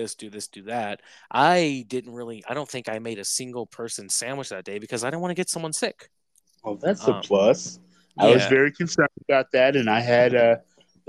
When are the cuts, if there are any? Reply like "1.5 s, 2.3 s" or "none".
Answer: none